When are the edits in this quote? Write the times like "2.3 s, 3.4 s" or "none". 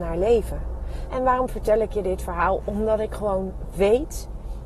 1.1 s